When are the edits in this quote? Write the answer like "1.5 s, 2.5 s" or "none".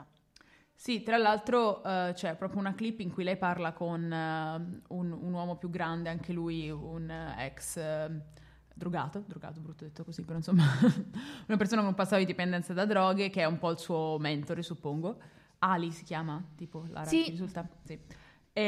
none